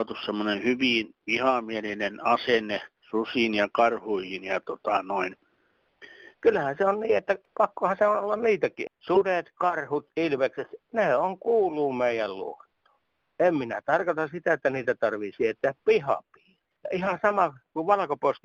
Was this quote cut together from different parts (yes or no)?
yes